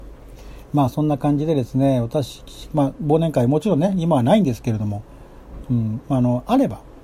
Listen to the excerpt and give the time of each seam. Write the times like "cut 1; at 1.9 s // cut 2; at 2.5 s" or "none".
cut 1; at 2.7 s // cut 2; at 5.6 s